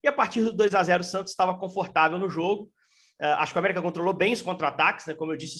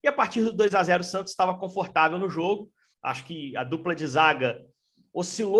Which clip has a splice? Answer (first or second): second